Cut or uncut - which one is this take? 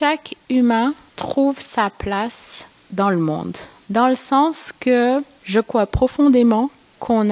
uncut